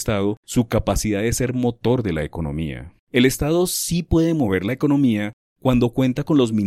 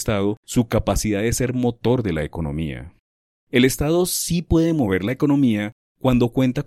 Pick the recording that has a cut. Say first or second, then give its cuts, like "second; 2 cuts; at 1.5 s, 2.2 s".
first; 1 cut; at 3.0 s